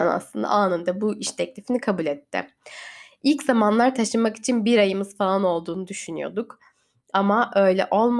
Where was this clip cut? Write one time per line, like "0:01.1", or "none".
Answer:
none